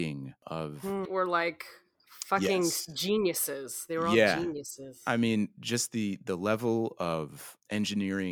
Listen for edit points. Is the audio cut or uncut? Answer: cut